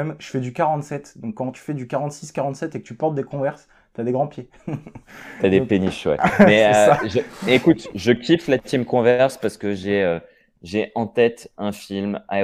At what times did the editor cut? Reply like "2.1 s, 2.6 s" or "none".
none